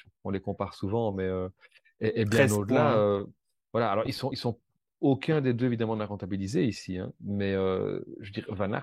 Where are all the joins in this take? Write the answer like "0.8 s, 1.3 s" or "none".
none